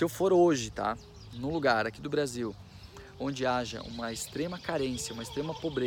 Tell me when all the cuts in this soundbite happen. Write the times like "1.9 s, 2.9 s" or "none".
none